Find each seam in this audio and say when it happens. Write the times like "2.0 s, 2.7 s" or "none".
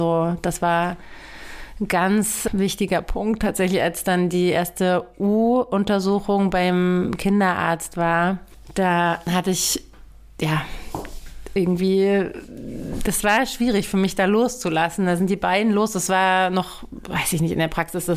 none